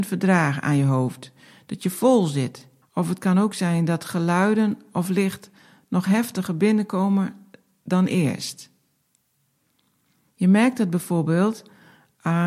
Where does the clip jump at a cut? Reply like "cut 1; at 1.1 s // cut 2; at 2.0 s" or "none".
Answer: cut 1; at 2.8 s // cut 2; at 10.3 s

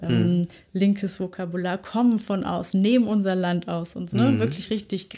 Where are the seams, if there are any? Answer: cut 1; at 4.1 s

